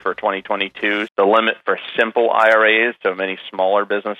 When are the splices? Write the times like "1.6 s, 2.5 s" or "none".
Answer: 1.1 s